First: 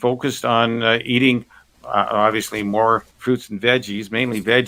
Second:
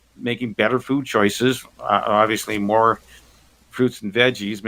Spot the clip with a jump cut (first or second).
first